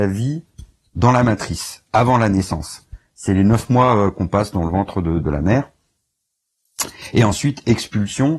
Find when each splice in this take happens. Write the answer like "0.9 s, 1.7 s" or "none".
5.2 s